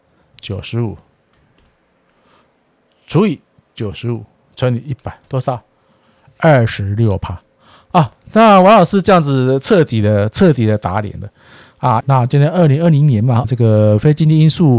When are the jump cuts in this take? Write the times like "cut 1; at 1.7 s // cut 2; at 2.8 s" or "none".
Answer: cut 1; at 12.0 s // cut 2; at 13.4 s

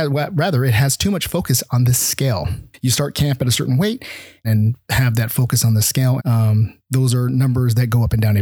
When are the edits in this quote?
cut 1; at 4.4 s // cut 2; at 6.2 s

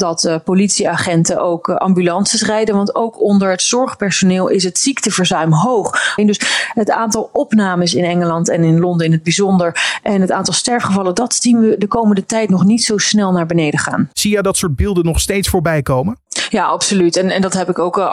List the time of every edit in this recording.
cut 1; at 6.2 s // cut 2; at 14.1 s

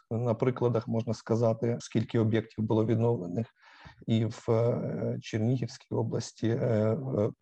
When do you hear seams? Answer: cut 1; at 1.8 s

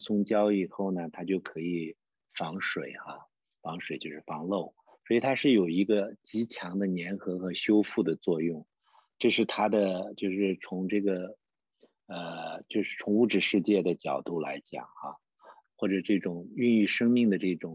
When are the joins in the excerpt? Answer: cut 1; at 15.6 s

